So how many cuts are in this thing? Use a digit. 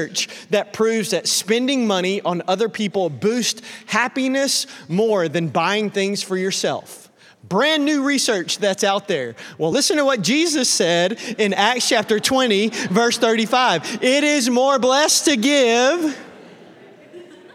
0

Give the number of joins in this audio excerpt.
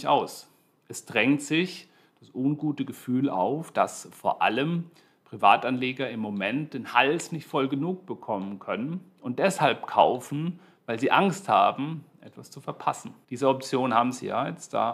1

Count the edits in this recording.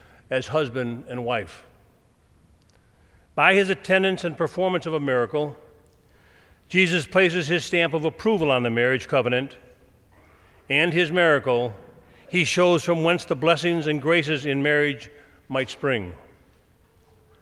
0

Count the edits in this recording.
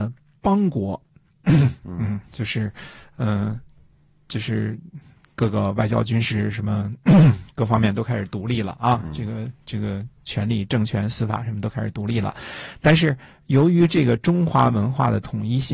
1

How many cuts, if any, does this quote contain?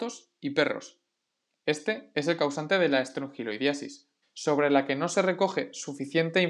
1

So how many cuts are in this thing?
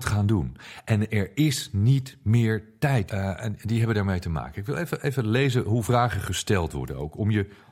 1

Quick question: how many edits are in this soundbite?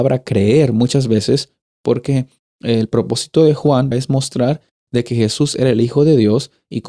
2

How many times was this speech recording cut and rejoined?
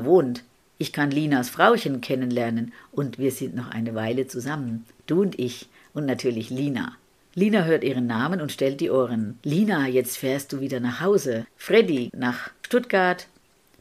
1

